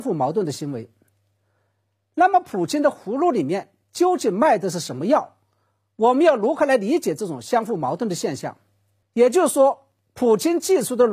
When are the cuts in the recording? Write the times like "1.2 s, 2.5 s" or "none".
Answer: 9.0 s